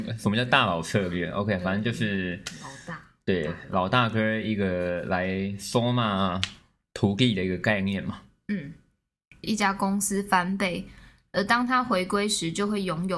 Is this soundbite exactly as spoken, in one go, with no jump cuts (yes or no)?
no